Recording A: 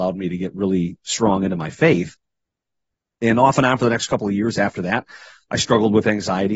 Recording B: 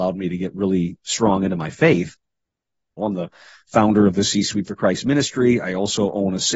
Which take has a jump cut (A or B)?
B